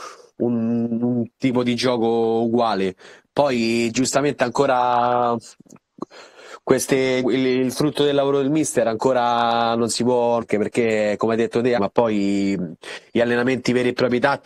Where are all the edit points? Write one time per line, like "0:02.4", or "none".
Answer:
0:07.2
0:10.4
0:11.8